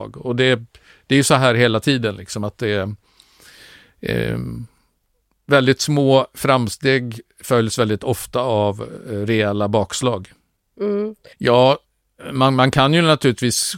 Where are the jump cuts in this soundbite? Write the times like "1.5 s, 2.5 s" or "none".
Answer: 11.3 s